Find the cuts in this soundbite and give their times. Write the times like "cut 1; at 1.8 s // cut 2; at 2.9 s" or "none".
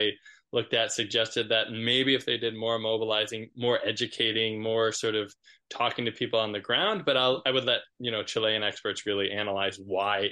none